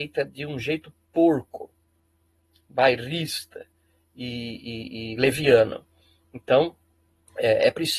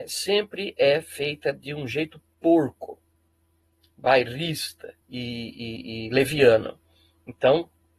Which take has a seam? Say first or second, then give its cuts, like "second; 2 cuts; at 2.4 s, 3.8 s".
second; 1 cut; at 5.0 s